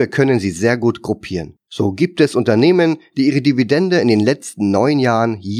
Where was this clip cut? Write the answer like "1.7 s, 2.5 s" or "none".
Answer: 1.6 s

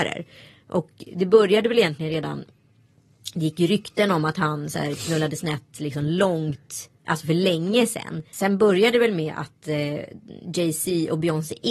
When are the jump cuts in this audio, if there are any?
8.3 s

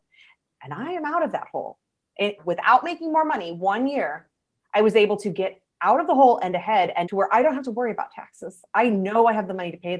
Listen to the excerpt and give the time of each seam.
2.4 s, 7.0 s

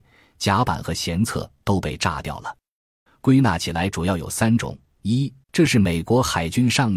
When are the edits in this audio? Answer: 3.1 s, 5.4 s

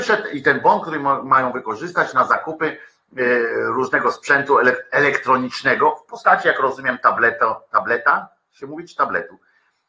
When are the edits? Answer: none

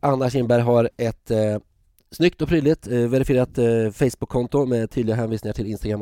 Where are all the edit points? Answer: 0.9 s

